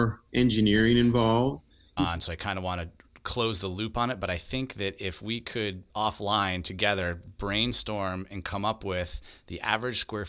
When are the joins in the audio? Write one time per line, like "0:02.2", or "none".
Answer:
0:02.0
0:05.9